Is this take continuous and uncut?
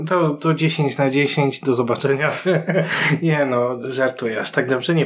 yes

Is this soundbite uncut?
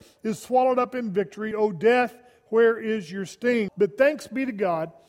no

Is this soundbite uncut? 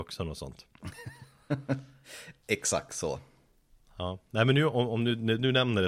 yes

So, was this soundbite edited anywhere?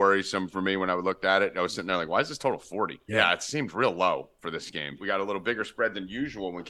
yes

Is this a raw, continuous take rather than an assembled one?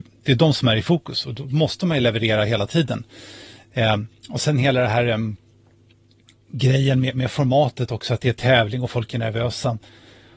yes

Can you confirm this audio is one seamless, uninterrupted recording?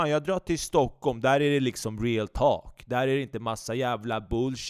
yes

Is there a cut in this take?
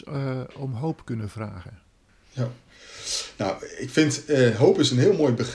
no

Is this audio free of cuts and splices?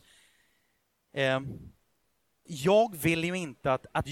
no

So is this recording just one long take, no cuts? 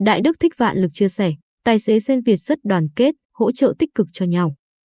yes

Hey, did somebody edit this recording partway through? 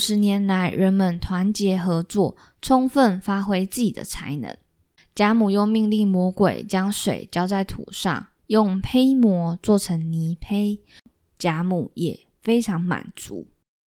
yes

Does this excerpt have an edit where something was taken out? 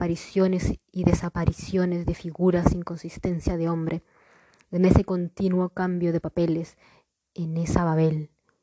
no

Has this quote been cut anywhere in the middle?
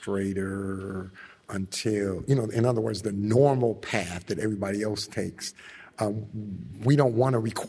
no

